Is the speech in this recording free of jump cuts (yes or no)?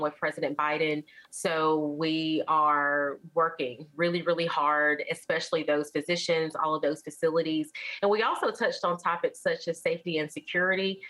no